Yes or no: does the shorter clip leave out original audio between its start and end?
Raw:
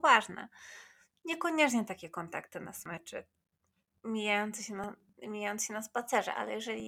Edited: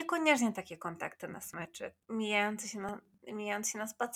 yes